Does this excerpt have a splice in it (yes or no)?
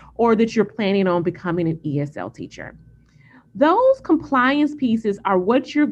no